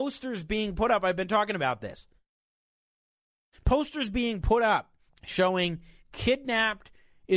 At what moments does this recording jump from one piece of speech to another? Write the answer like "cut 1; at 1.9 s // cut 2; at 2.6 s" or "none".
cut 1; at 5.1 s